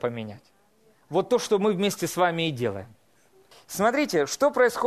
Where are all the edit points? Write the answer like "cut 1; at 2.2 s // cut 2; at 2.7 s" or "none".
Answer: cut 1; at 3.5 s

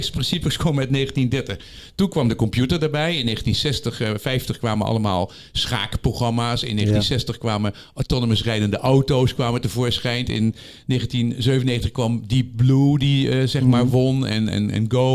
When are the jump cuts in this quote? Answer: none

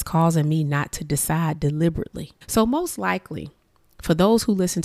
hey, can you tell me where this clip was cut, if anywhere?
cut 1; at 2.4 s

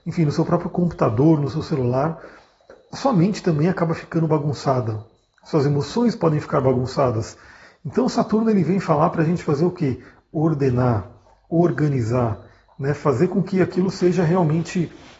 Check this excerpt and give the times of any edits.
none

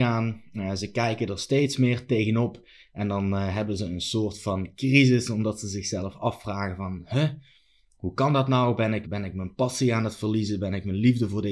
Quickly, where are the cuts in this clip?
cut 1; at 9.0 s

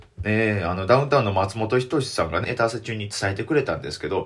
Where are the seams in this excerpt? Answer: cut 1; at 2.4 s

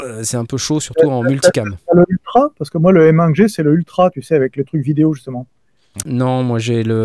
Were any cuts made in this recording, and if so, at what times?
cut 1; at 6.0 s

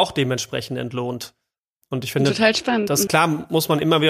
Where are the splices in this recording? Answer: cut 1; at 3.1 s

